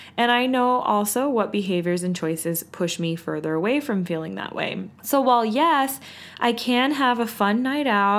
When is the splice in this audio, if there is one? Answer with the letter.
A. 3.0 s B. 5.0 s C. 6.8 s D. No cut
B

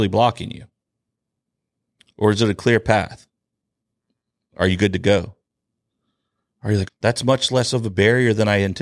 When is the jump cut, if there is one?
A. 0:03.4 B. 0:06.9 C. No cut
B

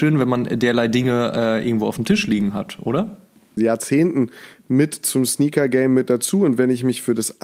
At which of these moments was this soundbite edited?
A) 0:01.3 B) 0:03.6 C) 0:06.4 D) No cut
B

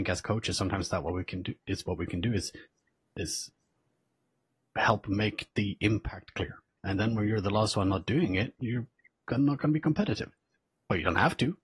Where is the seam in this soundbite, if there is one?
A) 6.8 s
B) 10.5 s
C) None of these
A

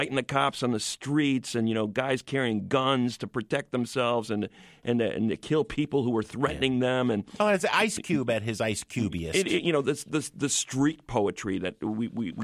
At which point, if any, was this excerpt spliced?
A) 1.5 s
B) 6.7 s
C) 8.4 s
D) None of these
D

